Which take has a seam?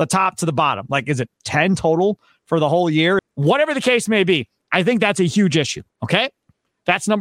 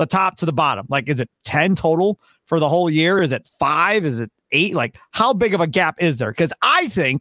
first; 1 cut; at 3.2 s

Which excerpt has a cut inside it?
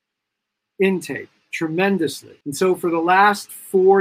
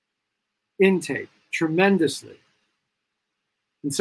first; 1 cut; at 2.4 s

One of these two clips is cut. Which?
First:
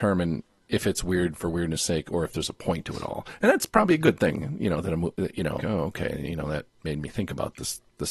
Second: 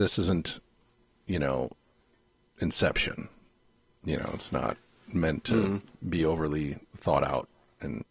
first; 1 cut; at 5.6 s

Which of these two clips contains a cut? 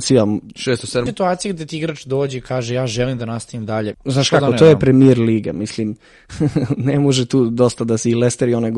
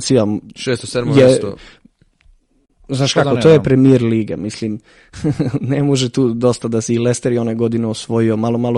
first; 2 cuts; at 1.1 s, 3.9 s

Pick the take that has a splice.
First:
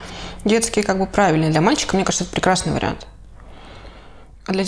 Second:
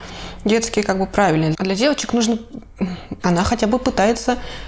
second; 2 cuts; at 1.5 s, 3.2 s

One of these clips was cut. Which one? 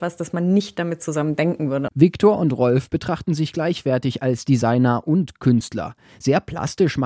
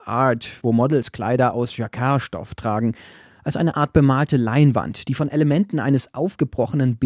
first; 1 cut; at 1.9 s

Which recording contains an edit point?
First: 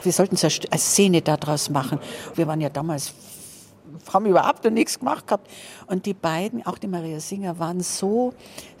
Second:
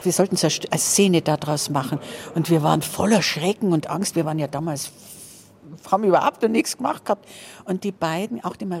first; 1 cut; at 2.3 s

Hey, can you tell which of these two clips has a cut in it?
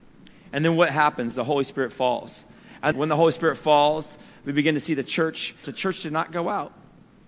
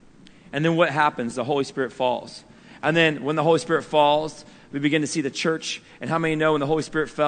first; 2 cuts; at 2.9 s, 5.6 s

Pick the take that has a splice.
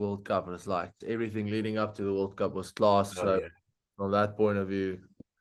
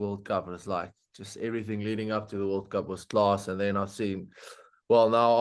first; 2 cuts; at 1.0 s, 3.1 s

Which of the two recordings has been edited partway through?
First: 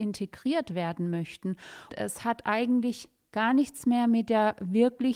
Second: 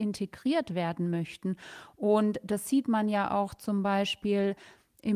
first; 1 cut; at 1.9 s

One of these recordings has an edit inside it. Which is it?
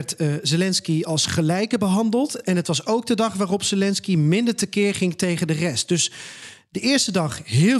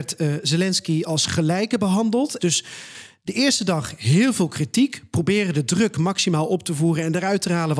second; 1 cut; at 2.4 s

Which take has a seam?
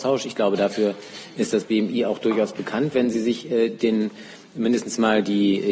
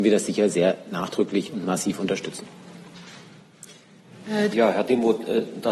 second; 1 cut; at 4.5 s

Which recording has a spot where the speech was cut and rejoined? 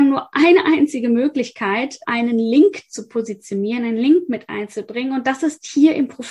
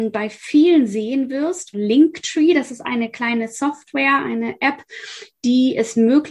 second; 1 cut; at 1.7 s

